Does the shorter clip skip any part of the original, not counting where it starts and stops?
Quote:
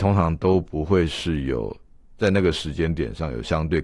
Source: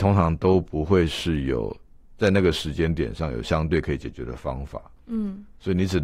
no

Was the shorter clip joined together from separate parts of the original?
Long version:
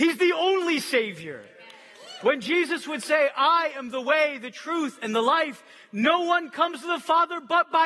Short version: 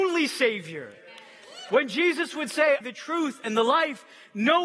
yes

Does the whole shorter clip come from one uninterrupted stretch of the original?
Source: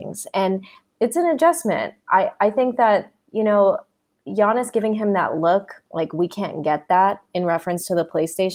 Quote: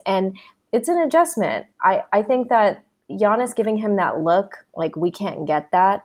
no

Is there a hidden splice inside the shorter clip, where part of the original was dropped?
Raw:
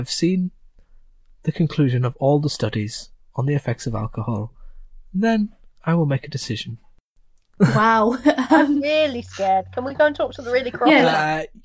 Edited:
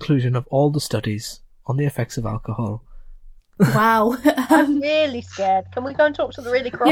yes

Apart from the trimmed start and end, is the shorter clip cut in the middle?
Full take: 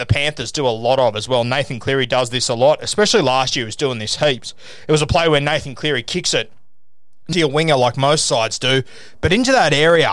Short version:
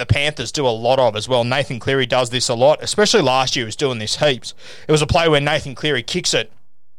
no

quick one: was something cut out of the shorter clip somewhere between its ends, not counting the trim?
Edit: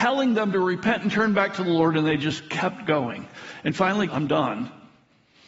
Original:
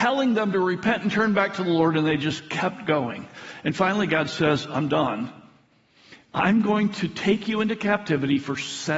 yes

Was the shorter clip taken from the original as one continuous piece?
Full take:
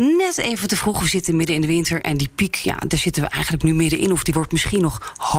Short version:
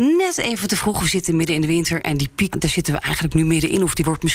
no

